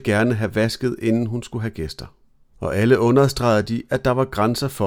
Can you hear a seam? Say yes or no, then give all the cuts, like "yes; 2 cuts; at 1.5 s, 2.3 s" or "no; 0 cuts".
yes; 1 cut; at 2.5 s